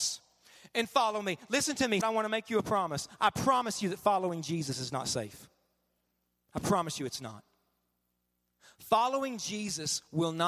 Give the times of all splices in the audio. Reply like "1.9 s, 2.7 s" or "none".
2.0 s